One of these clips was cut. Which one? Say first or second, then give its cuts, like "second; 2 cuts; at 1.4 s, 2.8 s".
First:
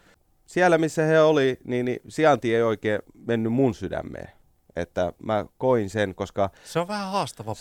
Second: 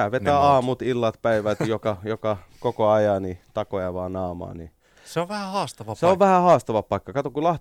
second; 1 cut; at 5.0 s